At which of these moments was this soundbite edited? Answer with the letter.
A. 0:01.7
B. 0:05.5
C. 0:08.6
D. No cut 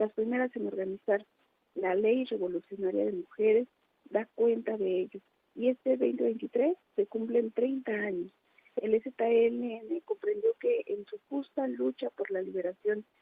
D